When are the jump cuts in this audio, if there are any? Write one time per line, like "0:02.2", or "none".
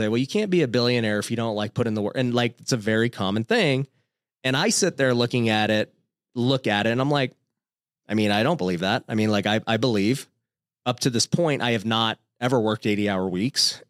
none